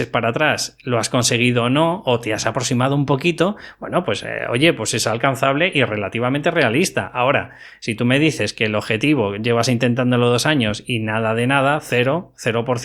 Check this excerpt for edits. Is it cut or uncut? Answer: uncut